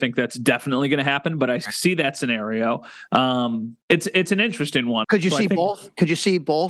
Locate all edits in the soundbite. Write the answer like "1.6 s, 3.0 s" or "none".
3.8 s, 5.0 s